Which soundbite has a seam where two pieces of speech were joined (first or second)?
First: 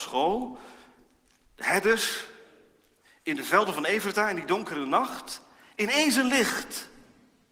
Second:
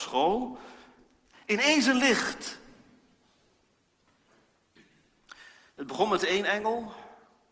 second